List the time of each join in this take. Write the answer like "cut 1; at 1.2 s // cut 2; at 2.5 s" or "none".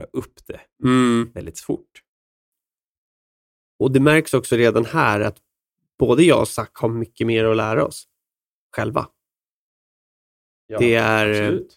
none